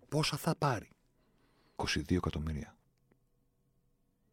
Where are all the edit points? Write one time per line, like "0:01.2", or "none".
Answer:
0:01.8

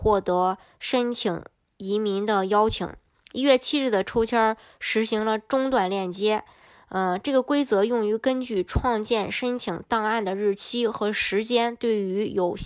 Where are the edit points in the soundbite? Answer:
none

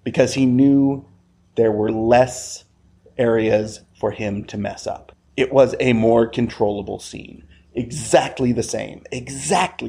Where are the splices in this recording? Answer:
none

